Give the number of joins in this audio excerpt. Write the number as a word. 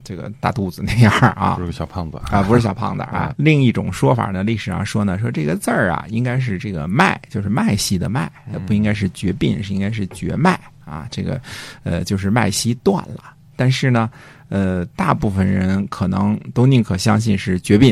one